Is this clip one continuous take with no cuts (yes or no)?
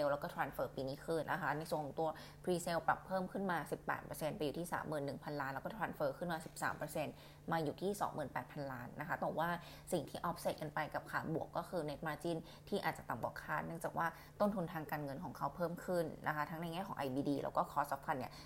no